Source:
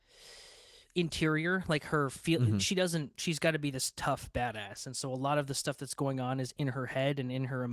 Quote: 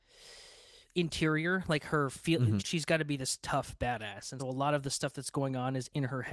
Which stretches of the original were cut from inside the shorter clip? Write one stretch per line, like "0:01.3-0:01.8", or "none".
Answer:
0:02.6-0:03.1
0:04.9-0:05.0